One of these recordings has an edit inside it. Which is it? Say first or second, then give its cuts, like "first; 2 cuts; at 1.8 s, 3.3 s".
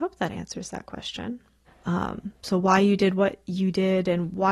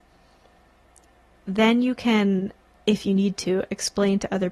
first; 1 cut; at 1.7 s